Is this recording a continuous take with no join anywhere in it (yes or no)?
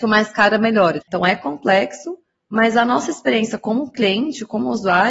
no